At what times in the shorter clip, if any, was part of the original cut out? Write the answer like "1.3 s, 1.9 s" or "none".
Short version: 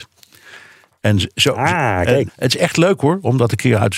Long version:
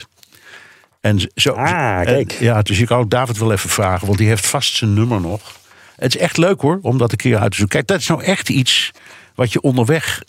2.3 s